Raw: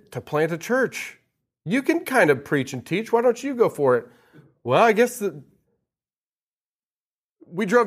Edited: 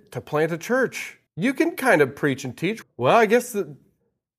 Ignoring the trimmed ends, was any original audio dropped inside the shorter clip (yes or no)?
yes